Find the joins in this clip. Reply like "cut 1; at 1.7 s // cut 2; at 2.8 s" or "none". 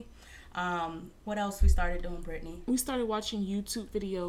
cut 1; at 1.2 s